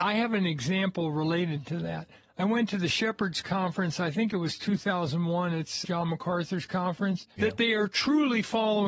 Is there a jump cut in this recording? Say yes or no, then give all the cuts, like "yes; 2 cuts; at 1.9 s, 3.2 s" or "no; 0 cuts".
yes; 2 cuts; at 5.8 s, 7.4 s